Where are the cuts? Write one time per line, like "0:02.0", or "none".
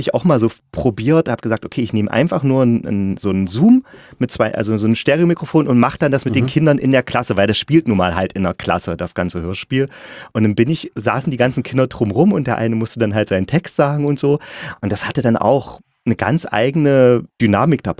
none